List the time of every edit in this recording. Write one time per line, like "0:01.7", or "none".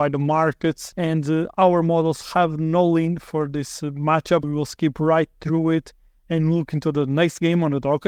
0:04.4